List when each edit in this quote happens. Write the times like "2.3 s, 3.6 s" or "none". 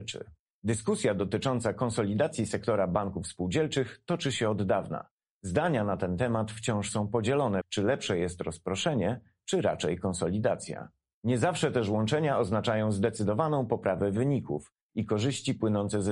7.6 s